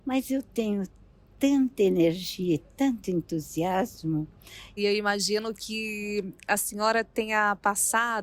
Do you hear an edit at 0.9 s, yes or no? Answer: no